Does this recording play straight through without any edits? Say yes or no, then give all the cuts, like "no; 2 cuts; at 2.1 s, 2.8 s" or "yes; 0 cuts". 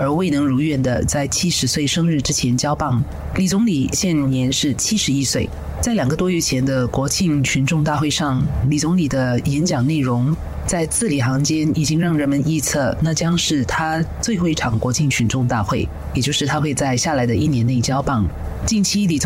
yes; 0 cuts